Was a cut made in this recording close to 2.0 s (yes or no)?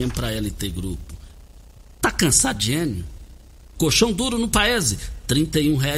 no